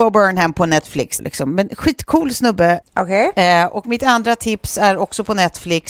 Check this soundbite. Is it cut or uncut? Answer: cut